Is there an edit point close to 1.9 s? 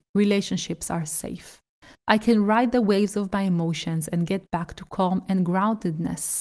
yes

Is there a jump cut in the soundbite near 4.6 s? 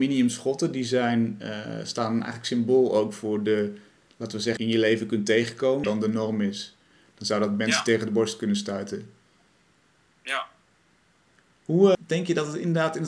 yes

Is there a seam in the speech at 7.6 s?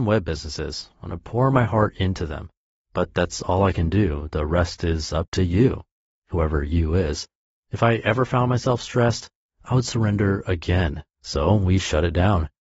yes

